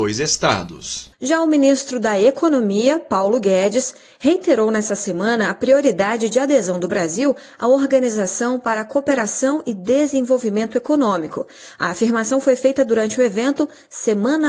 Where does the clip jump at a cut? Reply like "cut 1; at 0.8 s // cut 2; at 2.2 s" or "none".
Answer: none

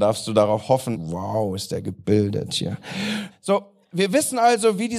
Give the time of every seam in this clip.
cut 1; at 0.9 s // cut 2; at 3.3 s

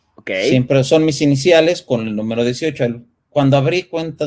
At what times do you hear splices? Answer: none

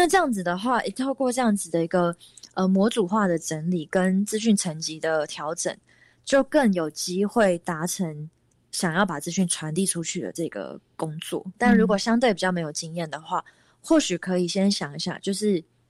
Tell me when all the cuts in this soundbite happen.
cut 1; at 11.5 s

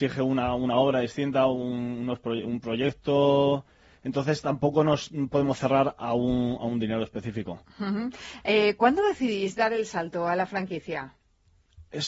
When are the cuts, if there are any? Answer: none

